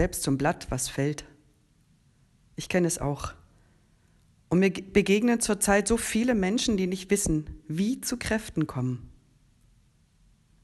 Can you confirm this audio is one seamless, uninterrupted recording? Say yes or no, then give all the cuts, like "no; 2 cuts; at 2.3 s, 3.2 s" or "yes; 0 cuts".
yes; 0 cuts